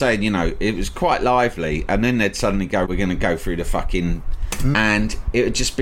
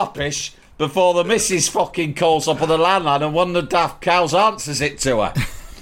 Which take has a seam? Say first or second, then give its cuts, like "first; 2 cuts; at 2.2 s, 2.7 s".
first; 2 cuts; at 2.8 s, 4.7 s